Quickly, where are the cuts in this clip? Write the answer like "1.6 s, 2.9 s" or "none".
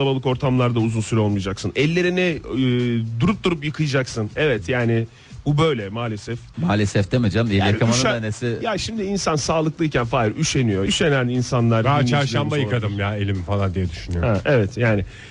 6.5 s, 10.9 s